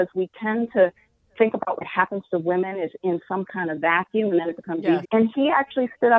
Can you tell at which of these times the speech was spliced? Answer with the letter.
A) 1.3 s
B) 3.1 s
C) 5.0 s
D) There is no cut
C